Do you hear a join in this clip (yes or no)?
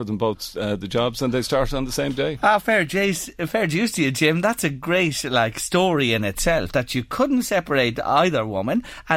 no